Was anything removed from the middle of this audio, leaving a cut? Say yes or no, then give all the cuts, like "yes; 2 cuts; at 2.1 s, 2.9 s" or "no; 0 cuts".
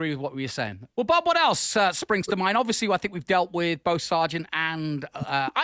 yes; 1 cut; at 0.9 s